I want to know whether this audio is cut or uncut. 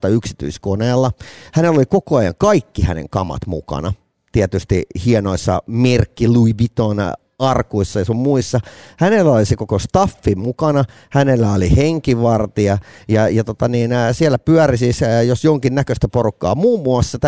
uncut